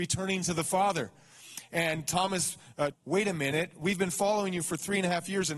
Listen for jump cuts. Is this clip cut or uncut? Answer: cut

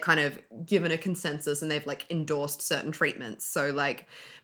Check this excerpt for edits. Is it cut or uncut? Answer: uncut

